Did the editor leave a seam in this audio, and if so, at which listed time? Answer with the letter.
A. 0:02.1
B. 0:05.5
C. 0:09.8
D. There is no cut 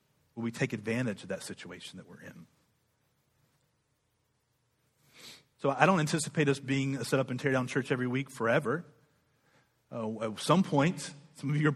B